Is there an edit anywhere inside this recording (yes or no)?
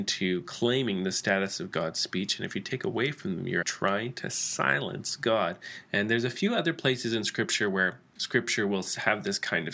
yes